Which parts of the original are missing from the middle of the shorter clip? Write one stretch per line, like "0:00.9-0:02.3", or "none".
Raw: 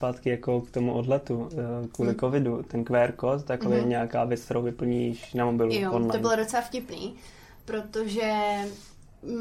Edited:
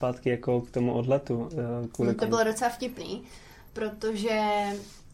0:02.2-0:06.1